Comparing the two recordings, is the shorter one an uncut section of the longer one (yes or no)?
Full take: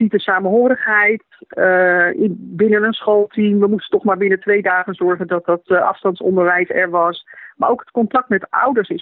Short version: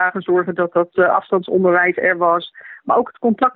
yes